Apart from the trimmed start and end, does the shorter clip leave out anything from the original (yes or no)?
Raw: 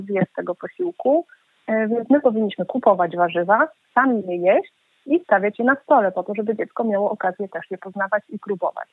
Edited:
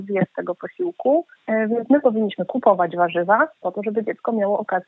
yes